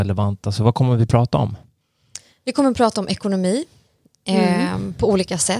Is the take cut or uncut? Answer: uncut